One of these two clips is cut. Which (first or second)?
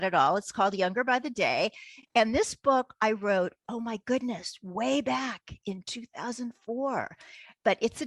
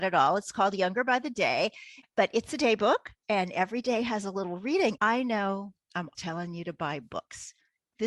second